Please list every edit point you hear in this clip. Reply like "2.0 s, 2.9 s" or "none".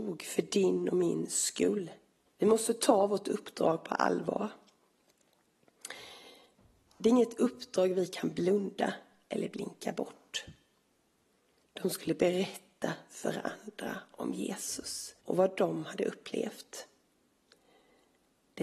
2.3 s, 11.6 s, 15.2 s